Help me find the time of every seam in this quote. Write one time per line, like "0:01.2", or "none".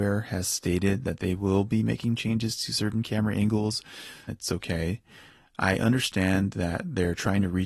0:04.3